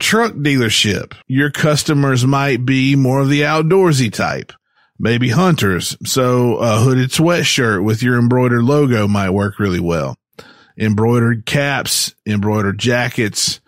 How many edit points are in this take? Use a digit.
1